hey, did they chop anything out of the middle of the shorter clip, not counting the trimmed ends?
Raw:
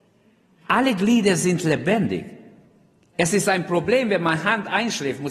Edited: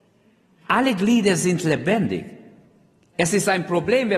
no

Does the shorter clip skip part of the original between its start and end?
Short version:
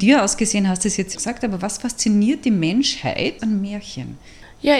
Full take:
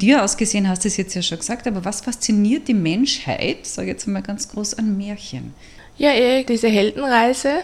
yes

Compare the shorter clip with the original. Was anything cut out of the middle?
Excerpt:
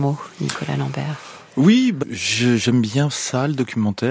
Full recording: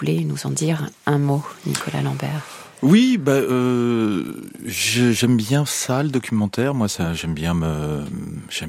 yes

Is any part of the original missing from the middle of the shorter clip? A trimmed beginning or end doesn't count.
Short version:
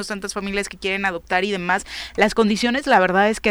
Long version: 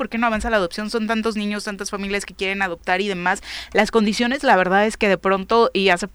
no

